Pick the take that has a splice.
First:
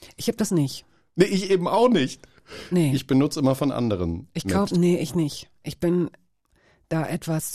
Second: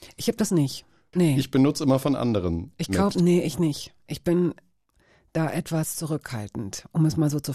second; 1 cut; at 1.1 s

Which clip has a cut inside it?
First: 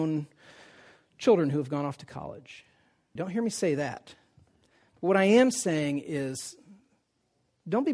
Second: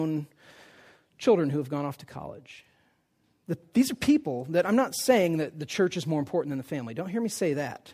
first; 1 cut; at 3.2 s

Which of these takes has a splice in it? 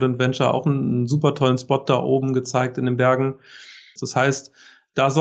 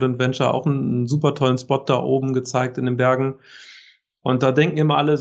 first; 1 cut; at 4.0 s

